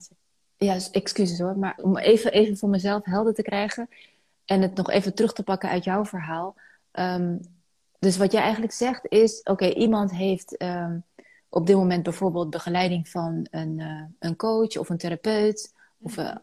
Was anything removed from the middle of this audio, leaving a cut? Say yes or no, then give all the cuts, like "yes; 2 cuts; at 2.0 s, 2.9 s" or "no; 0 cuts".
yes; 1 cut; at 1.8 s